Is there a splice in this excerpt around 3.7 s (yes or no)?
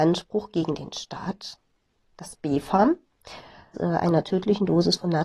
yes